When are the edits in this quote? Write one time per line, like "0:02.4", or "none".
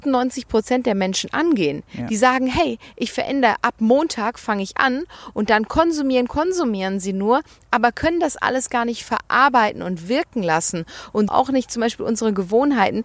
0:06.3
0:11.3